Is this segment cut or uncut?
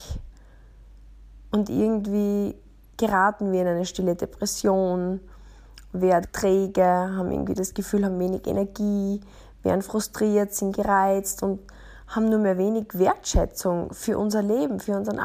cut